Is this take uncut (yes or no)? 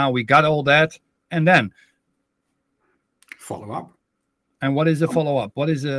no